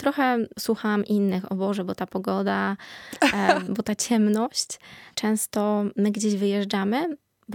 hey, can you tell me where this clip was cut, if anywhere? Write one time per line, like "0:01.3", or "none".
0:03.7
0:05.1